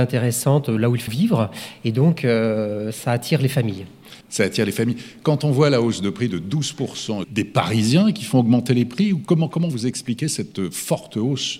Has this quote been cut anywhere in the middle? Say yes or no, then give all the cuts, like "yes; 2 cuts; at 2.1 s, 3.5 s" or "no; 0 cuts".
yes; 3 cuts; at 1.1 s, 4.2 s, 7.2 s